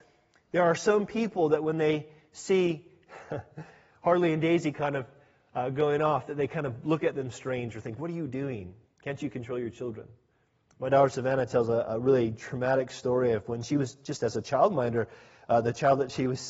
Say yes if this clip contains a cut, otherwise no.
no